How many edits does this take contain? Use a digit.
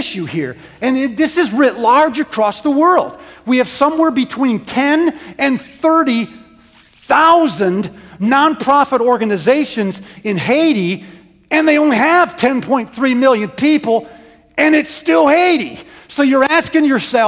0